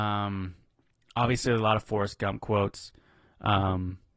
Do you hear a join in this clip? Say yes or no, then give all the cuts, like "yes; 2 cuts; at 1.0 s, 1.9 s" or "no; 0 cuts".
no; 0 cuts